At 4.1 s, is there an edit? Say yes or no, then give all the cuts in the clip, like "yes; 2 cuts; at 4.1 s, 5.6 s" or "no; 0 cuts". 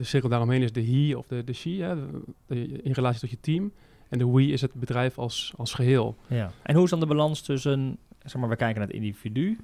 no; 1 cut; at 6.6 s